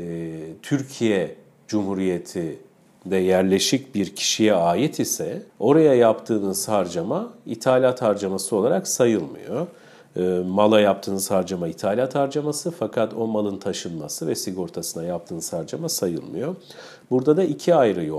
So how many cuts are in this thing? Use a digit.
1